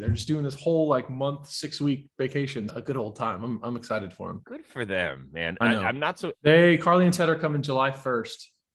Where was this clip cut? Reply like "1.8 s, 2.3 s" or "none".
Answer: 2.7 s, 6.3 s